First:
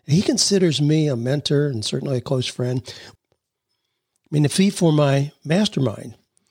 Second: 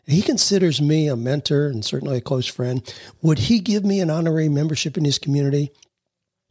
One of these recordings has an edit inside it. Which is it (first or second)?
first